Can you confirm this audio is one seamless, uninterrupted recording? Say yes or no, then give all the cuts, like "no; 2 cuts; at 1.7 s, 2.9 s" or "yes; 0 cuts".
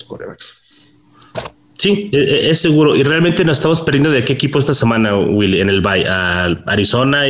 yes; 0 cuts